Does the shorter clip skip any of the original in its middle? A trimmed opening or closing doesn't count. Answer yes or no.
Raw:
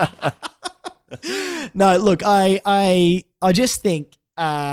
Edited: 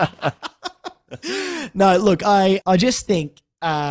yes